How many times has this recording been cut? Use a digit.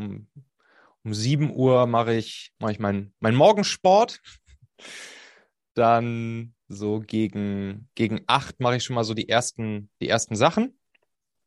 2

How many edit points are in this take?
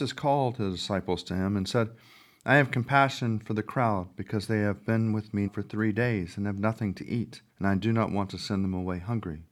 2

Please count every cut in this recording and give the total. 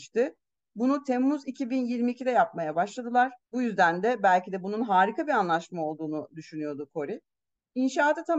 1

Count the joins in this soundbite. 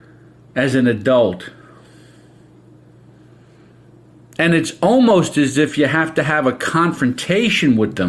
0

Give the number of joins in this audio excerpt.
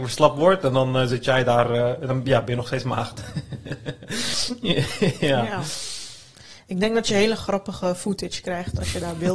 0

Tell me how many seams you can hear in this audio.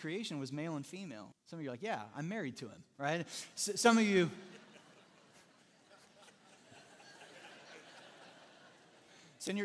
1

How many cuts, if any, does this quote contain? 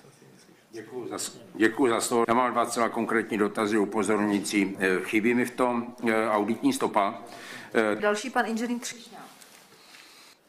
2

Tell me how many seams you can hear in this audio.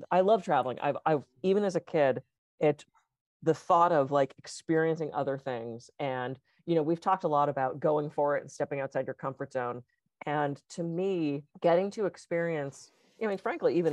1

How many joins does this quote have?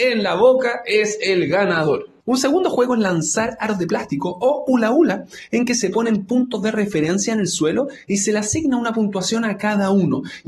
0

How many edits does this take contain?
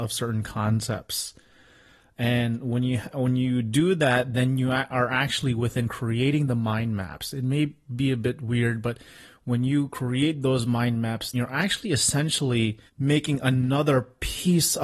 2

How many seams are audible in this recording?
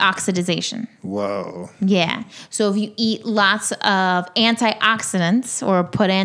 0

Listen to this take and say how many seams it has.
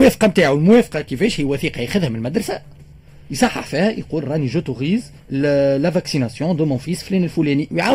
1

